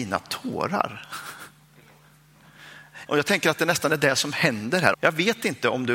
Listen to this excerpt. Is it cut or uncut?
cut